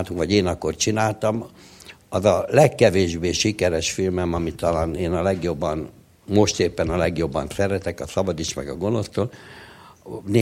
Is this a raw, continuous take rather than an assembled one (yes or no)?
yes